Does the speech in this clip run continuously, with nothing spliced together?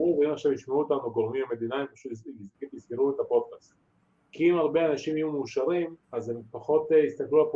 no; 1 cut; at 6.0 s

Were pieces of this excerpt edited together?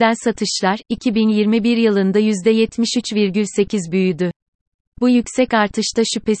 no; 0 cuts

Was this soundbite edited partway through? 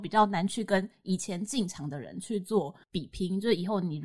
yes; 1 cut; at 2.8 s

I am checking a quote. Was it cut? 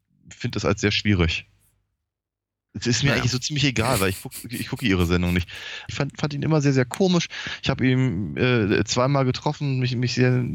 yes; 2 cuts; at 2.7 s, 5.9 s

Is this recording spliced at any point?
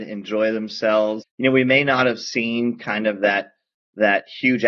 yes; 1 cut; at 1.2 s

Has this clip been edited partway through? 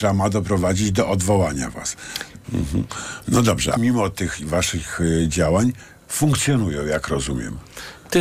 yes; 2 cuts; at 2.4 s, 3.8 s

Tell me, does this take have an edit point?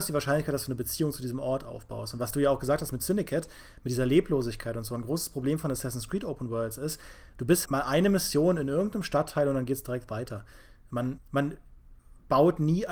yes; 2 cuts; at 7.7 s, 11.2 s

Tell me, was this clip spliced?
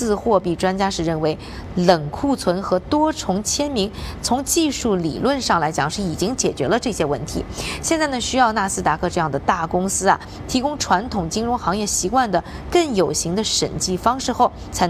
no; 0 cuts

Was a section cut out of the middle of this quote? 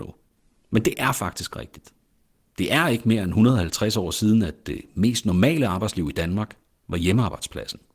no; 0 cuts

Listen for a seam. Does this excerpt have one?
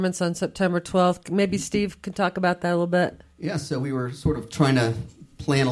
no; 0 cuts

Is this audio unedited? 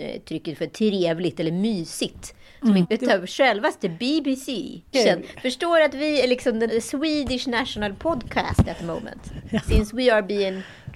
no; 3 cuts; at 2.8 s, 4.9 s, 6.7 s

